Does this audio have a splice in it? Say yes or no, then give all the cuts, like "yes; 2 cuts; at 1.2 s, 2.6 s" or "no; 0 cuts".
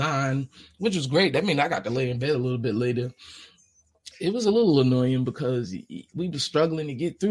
no; 0 cuts